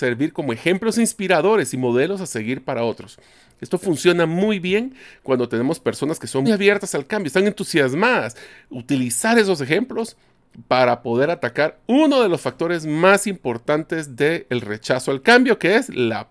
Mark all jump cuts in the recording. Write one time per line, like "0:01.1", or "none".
0:06.4